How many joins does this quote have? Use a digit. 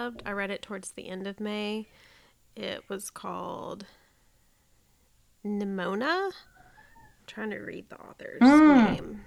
0